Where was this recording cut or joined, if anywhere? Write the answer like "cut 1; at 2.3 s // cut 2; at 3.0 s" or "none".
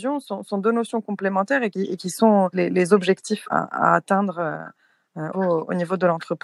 cut 1; at 3.4 s // cut 2; at 5.3 s